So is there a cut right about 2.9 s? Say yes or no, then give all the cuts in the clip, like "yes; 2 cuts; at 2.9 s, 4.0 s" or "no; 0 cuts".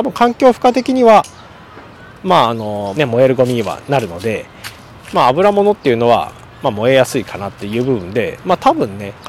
yes; 1 cut; at 2.9 s